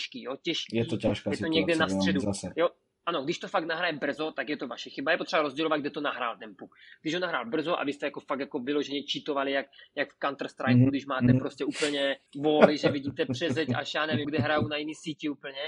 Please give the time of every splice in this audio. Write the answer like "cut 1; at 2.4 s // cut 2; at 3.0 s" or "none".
cut 1; at 12.3 s // cut 2; at 14.2 s